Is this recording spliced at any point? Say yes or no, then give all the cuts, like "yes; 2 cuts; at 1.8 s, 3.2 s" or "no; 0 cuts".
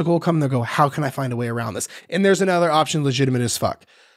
no; 0 cuts